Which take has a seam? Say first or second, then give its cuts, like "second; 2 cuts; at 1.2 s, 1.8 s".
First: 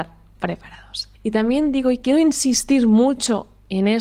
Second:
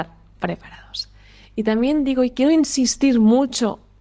first; 1 cut; at 1.1 s